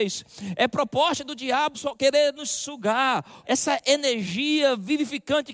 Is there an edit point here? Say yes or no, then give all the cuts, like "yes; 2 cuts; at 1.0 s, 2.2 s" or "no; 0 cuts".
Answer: yes; 2 cuts; at 1.7 s, 3.4 s